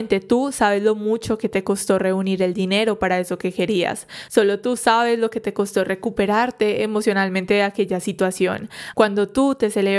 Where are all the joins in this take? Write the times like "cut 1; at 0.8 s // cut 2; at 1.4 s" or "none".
cut 1; at 4.3 s // cut 2; at 8.9 s